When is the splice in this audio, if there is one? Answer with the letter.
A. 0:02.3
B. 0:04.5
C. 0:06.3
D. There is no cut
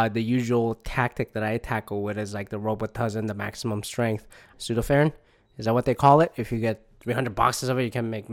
B